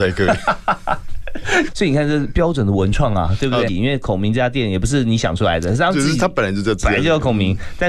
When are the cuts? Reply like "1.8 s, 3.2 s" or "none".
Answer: 1.7 s, 3.7 s